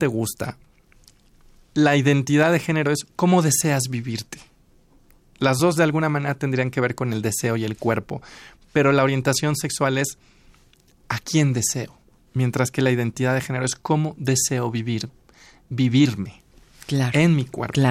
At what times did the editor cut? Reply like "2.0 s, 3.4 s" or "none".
none